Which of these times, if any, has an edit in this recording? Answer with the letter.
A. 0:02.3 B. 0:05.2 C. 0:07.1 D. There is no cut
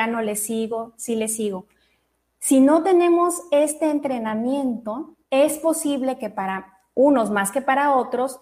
B